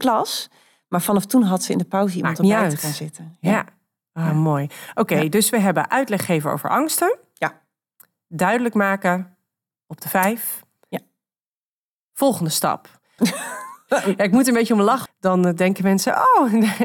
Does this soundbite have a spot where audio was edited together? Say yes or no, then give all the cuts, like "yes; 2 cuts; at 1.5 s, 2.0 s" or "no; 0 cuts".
yes; 2 cuts; at 13.2 s, 15.1 s